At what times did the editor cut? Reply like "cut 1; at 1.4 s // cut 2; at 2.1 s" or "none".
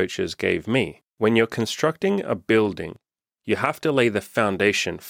cut 1; at 1.1 s